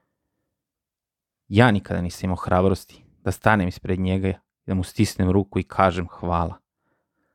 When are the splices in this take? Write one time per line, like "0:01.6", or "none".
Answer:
none